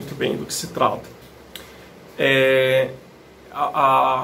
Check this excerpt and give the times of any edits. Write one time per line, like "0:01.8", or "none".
none

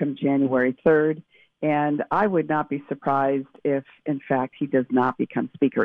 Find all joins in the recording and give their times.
none

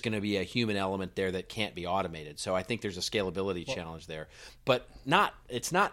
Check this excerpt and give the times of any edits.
none

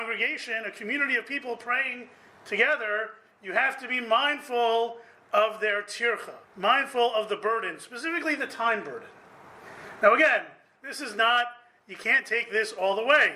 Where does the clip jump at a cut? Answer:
0:06.4

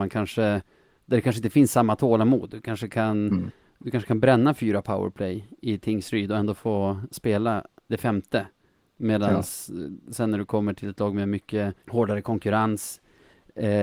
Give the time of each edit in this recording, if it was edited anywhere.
0:07.8
0:11.8

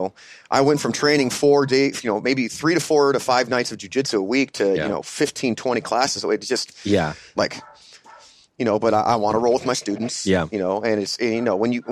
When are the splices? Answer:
0:07.4

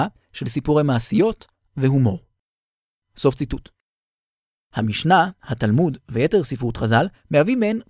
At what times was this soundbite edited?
0:04.6

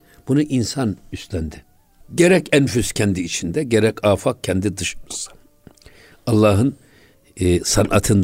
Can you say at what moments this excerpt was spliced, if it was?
0:02.0

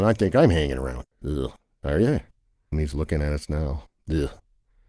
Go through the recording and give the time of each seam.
0:02.7

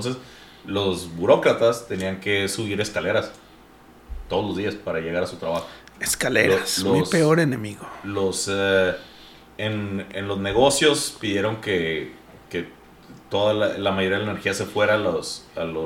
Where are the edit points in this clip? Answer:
none

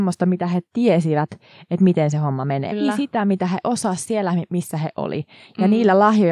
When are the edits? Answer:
0:02.7

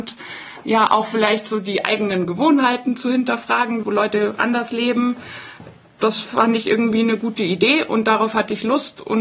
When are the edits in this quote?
0:03.8

